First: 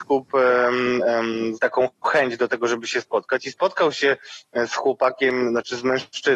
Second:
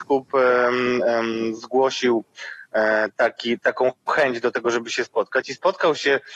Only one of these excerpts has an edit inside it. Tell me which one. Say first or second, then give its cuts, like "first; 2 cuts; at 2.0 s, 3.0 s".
first; 1 cut; at 1.6 s